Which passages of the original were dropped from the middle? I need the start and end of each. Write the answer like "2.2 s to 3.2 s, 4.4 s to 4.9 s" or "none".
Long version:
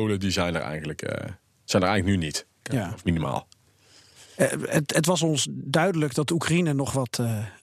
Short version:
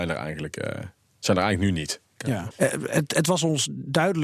3.0 s to 4.3 s